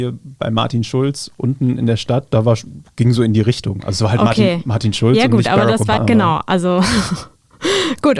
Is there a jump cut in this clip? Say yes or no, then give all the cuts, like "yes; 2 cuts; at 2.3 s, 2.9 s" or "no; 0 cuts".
yes; 1 cut; at 6.0 s